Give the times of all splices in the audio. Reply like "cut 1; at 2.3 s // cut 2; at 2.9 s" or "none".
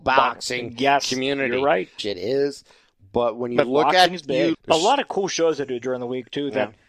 cut 1; at 2.0 s // cut 2; at 4.5 s